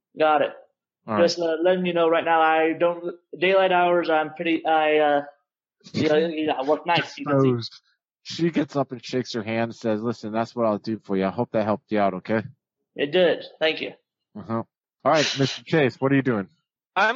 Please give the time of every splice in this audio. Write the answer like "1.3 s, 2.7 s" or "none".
none